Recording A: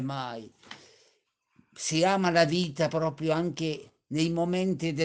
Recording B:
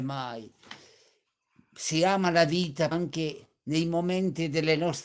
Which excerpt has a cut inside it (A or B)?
B